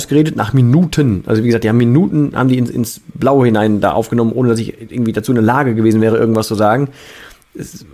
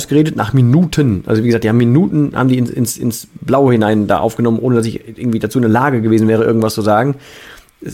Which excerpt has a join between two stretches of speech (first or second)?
first